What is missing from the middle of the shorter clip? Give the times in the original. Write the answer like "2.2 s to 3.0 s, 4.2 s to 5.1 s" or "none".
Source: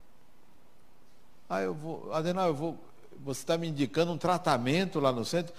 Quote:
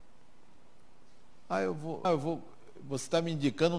2.0 s to 2.4 s